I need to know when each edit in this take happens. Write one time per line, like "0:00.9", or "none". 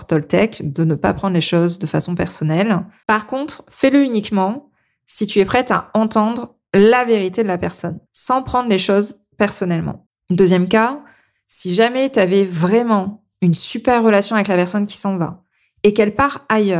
0:03.0
0:08.1
0:10.1